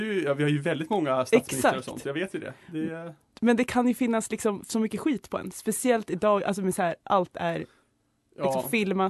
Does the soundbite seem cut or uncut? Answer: uncut